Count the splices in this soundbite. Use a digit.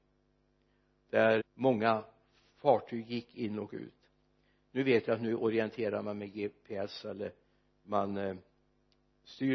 1